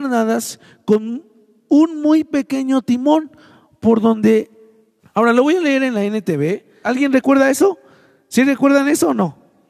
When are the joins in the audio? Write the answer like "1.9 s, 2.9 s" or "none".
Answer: 5.0 s, 6.8 s